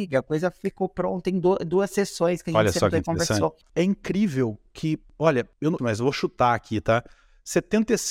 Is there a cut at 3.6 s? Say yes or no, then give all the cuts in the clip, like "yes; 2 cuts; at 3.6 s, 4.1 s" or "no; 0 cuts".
yes; 2 cuts; at 3.6 s, 5.8 s